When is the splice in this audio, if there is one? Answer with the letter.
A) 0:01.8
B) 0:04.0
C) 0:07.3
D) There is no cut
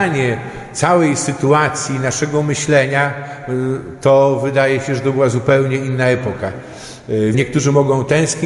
C